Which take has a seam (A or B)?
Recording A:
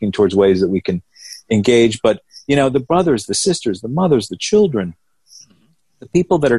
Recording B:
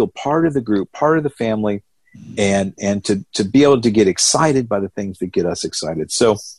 A